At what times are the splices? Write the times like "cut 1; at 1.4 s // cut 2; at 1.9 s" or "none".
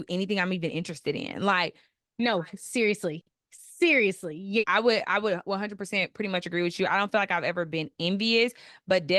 cut 1; at 4.6 s